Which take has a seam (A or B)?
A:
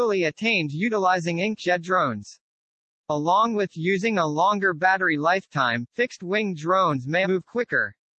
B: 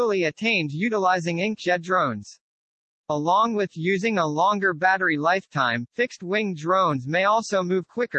A